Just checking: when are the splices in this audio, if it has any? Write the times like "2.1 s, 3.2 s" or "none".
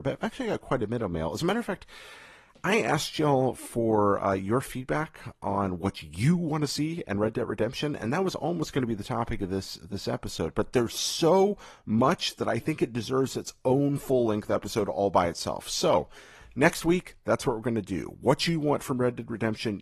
none